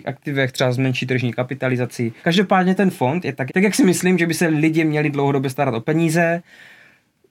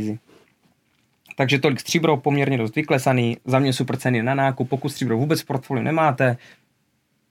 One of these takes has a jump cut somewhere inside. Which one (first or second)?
first